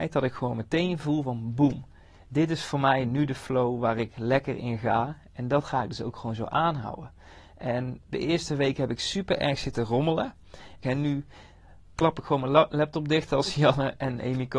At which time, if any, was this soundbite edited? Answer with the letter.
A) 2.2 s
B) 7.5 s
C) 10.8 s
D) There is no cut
C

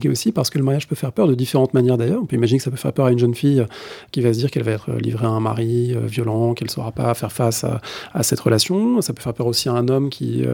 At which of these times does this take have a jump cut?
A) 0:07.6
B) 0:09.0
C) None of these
C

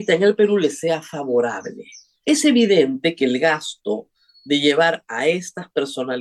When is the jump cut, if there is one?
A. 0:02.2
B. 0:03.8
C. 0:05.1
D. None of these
A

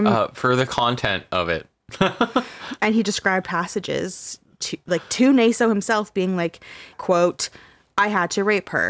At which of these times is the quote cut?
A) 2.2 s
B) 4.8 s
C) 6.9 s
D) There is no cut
C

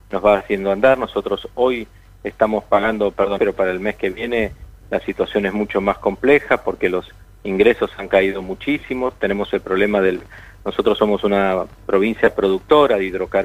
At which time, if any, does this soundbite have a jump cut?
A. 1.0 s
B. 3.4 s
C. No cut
B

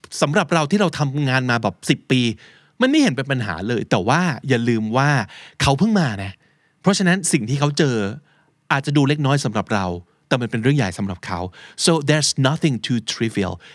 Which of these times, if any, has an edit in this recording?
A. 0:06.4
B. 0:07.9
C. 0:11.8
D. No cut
D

